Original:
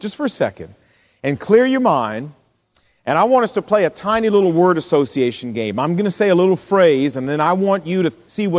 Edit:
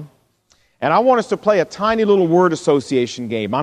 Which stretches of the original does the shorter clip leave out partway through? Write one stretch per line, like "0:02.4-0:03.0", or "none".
none

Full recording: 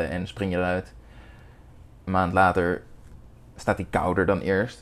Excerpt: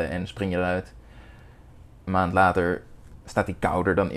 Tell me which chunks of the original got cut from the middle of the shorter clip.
0:03.2-0:03.5

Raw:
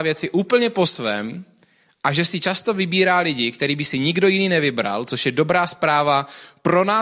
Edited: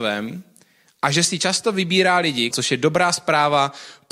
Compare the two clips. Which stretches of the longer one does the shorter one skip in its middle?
0:03.5-0:05.0

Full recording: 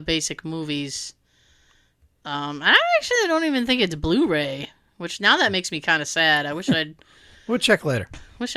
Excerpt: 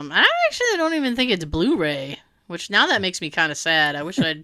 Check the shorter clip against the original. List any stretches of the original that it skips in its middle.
none

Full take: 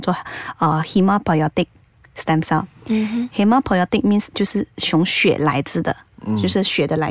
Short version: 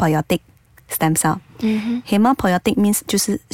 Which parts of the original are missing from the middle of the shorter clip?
none

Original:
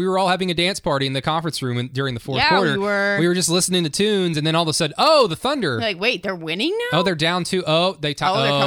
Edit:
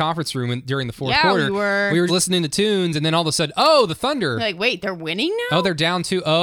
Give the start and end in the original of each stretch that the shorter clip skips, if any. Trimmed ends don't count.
0:03.3-0:03.5

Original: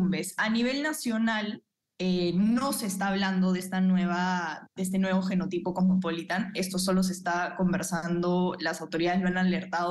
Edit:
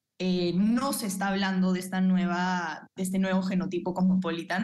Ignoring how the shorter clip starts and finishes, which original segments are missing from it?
none

